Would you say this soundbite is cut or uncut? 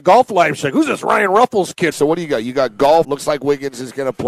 cut